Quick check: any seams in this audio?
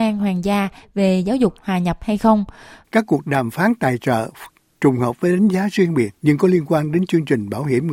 yes; 2 cuts; at 2.8 s, 6.1 s

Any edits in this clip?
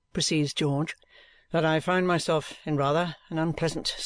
no; 0 cuts

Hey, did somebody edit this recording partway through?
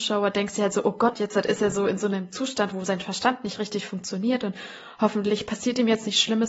yes; 2 cuts; at 1.1 s, 2.7 s

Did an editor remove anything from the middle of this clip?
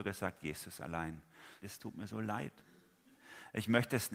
yes; 1 cut; at 1.6 s

